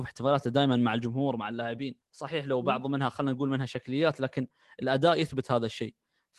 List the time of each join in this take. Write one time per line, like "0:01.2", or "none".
0:02.0